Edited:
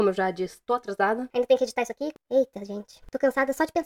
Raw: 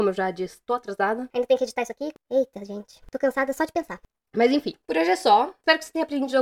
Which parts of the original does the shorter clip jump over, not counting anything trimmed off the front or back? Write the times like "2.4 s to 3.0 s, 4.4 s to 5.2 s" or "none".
none